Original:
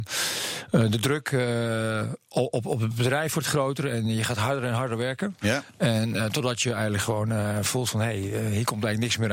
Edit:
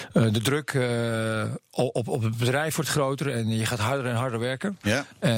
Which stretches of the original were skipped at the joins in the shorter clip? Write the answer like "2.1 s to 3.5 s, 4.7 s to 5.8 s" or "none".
none